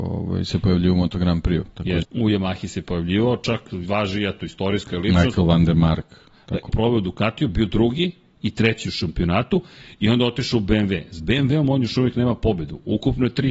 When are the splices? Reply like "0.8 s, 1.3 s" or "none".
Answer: 2.0 s, 6.7 s